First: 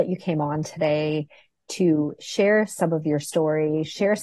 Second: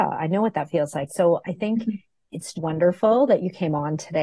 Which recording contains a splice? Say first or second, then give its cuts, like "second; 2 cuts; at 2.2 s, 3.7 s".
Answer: second; 2 cuts; at 1.1 s, 2.5 s